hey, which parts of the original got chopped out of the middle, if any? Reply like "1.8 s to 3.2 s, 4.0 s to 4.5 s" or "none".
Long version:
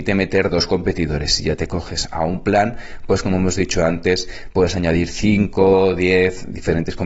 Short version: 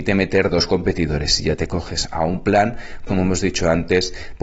3.1 s to 3.2 s